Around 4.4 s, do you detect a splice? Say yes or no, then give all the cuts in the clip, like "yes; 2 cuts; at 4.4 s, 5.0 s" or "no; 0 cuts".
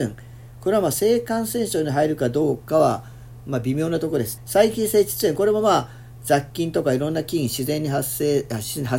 yes; 1 cut; at 4.4 s